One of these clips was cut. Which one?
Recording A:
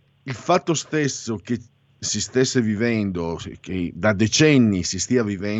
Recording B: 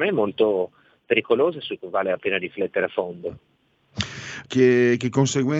B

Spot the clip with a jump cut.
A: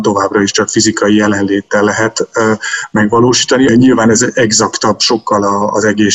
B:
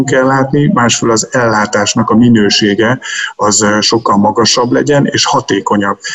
A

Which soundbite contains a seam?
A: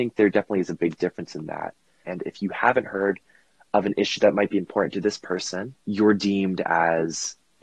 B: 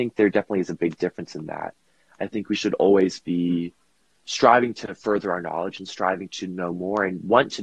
A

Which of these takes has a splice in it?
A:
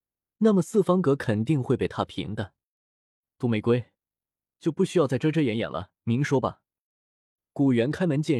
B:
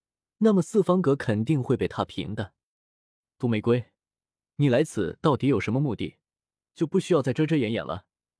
A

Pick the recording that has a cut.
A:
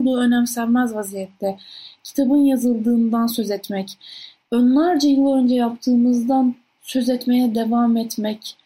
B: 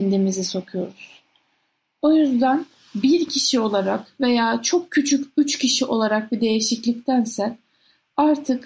A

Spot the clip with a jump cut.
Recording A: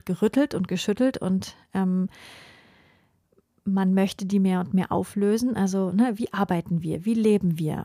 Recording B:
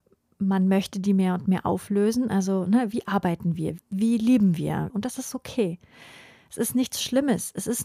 B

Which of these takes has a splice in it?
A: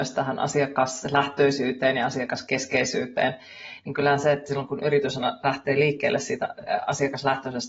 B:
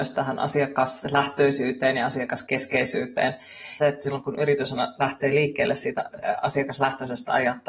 B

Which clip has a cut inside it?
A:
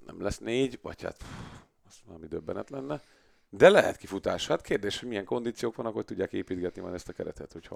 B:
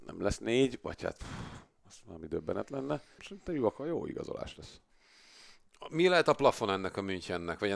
B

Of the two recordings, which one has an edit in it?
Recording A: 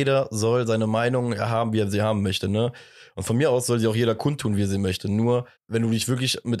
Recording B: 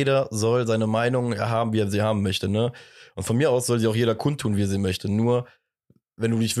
A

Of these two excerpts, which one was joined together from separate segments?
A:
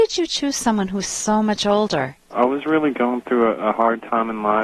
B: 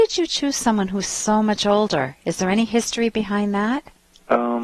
A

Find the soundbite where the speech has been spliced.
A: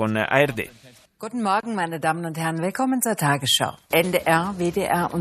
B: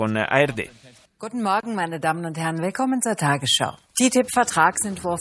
A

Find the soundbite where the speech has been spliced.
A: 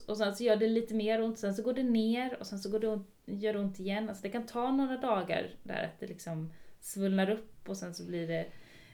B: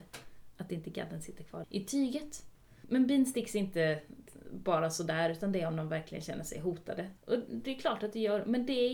B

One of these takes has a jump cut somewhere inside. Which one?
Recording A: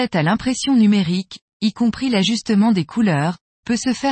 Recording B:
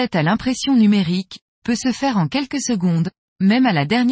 B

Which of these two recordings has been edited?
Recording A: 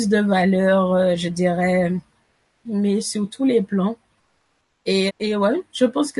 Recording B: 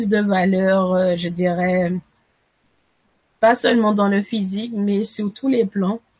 A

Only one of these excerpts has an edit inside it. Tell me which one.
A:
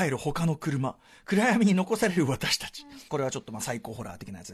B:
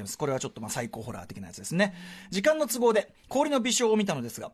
A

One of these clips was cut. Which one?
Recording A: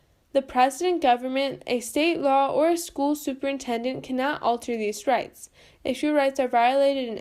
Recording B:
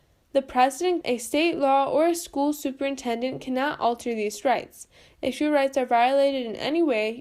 B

